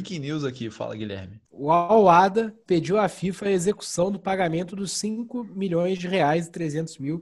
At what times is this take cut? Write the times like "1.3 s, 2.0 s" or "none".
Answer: 1.4 s, 2.7 s

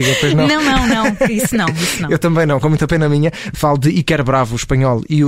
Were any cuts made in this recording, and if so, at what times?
3.5 s

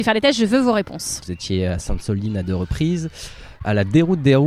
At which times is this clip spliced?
1.2 s

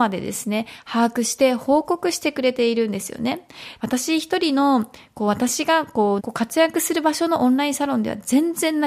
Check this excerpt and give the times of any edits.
3.8 s, 6.2 s

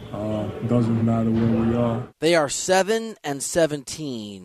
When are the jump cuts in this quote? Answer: 1.0 s, 2.2 s

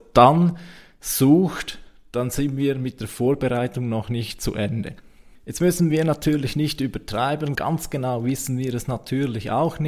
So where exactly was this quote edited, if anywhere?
7.6 s

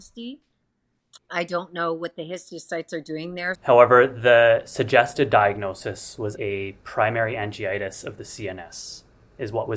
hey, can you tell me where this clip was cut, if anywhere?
3.5 s, 6.4 s

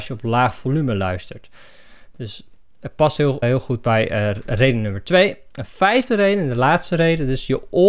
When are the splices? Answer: 3.4 s

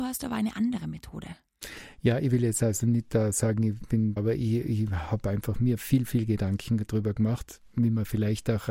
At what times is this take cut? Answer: 4.2 s

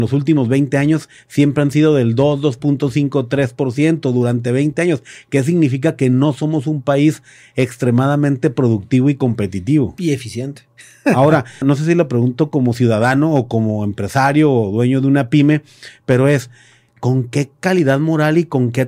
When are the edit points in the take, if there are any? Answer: 11.6 s

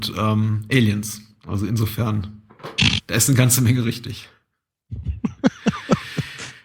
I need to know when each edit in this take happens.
none

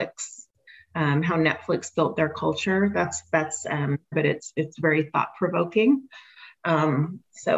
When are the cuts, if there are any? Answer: 4.1 s

